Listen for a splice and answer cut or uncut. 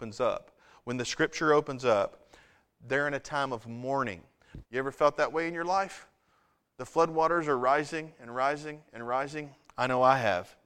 cut